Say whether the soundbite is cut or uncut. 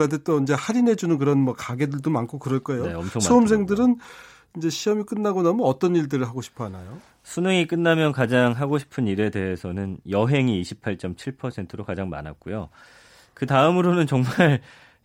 uncut